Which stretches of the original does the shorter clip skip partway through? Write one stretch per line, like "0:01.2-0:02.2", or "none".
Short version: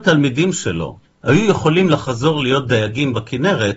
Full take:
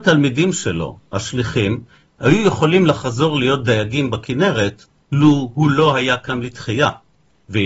0:01.0-0:02.0